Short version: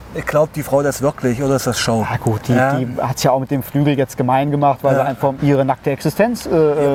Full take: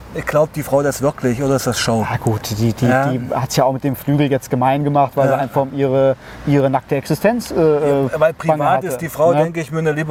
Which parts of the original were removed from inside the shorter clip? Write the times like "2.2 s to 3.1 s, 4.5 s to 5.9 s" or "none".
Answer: 2.4 s to 2.7 s, 5.7 s to 6.4 s